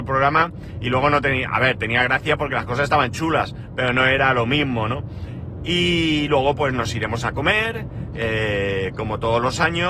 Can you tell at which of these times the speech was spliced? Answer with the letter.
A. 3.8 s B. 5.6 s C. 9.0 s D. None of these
D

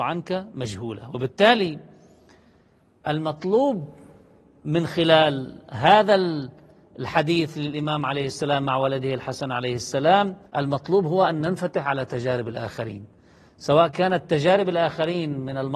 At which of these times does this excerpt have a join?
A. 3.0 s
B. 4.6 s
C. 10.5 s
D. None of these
C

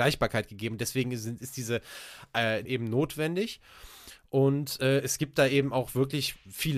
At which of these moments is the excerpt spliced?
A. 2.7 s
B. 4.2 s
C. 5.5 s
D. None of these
A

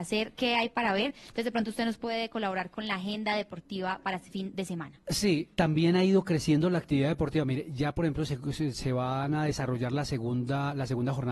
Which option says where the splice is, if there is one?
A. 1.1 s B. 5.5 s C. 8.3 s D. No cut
B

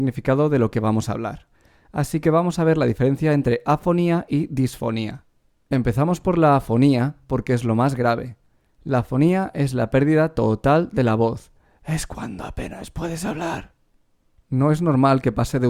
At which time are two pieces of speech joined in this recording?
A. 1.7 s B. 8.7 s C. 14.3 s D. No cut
D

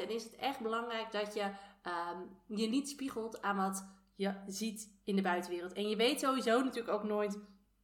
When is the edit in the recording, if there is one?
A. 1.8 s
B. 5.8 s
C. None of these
C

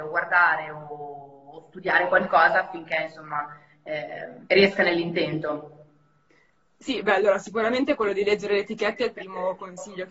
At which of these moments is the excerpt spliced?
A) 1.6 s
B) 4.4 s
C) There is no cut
B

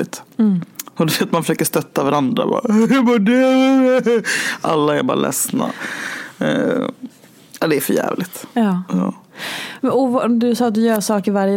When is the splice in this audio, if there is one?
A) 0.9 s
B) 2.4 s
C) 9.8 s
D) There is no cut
A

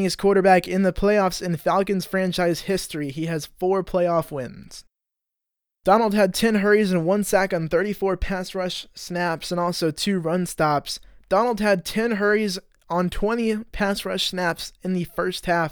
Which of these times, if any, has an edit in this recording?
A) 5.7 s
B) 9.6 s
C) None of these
A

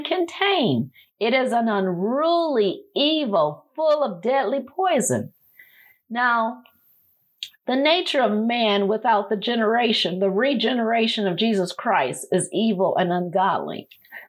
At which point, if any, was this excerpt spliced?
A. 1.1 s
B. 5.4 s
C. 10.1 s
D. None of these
D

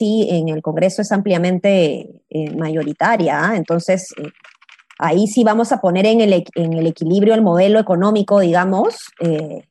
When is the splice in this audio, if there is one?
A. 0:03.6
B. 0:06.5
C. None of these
C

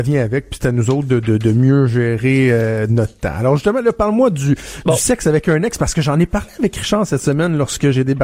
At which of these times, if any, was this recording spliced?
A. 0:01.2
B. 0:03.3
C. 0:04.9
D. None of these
A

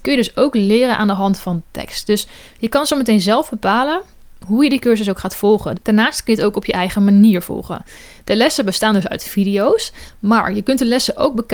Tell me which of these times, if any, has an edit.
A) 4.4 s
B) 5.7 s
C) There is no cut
B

